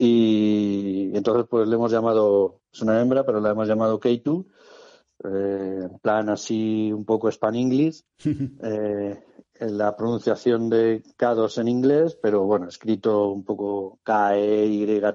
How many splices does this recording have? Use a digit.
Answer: 0